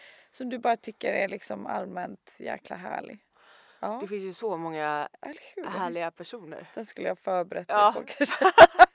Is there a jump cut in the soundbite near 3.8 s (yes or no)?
yes